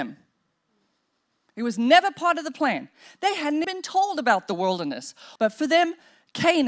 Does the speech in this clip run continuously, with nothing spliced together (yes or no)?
no